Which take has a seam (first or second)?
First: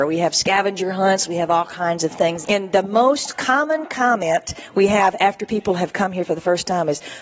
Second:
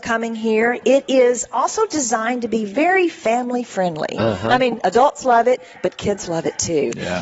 first